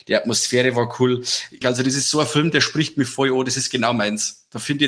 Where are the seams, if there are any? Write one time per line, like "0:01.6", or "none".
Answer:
0:01.6